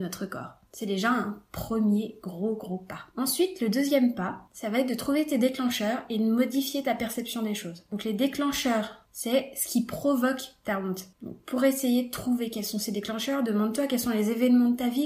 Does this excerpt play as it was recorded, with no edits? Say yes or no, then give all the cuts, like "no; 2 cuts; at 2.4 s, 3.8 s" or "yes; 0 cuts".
no; 1 cut; at 11.1 s